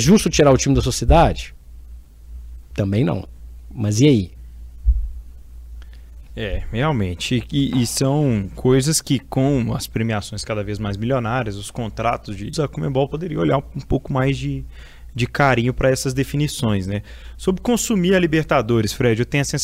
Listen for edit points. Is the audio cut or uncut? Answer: cut